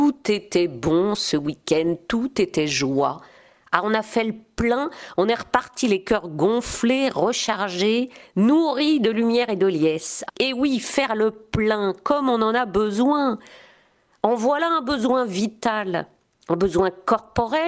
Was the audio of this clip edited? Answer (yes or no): yes